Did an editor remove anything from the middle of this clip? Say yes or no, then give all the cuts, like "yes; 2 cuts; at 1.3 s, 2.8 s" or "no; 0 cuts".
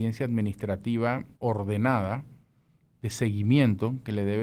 yes; 1 cut; at 1.3 s